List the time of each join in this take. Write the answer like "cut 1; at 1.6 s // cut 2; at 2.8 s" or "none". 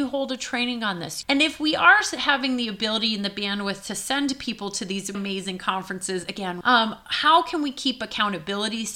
cut 1; at 1.2 s // cut 2; at 5.1 s // cut 3; at 6.6 s